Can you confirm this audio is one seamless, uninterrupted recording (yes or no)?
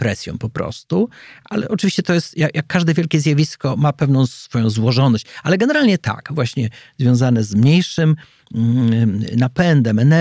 yes